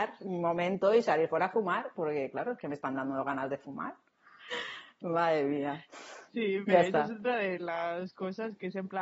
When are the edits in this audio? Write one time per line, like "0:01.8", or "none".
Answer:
0:04.5
0:06.3